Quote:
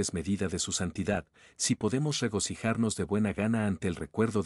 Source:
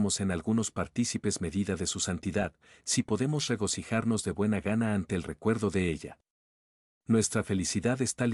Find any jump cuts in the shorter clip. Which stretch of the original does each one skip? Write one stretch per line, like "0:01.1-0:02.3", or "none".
none